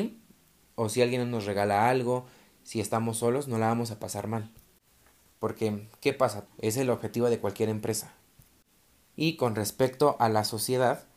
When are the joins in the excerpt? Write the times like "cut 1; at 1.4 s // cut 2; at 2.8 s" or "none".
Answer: cut 1; at 5.4 s // cut 2; at 6.5 s